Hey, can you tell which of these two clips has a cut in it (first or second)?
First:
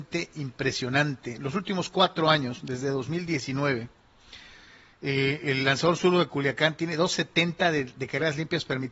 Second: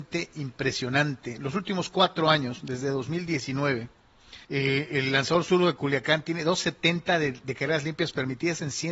second